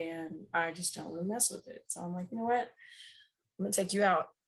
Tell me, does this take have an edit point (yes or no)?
no